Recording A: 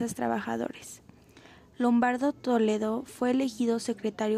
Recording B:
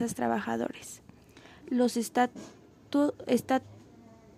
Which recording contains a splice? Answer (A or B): B